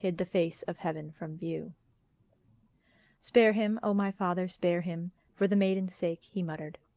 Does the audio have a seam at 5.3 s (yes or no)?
yes